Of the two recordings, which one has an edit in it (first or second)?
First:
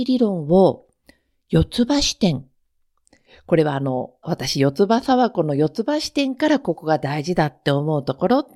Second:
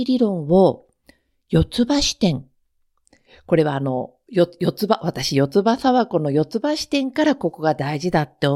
first